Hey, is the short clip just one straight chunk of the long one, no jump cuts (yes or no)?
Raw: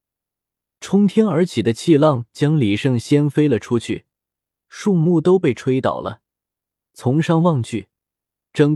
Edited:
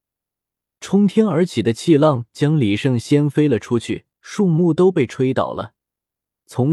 no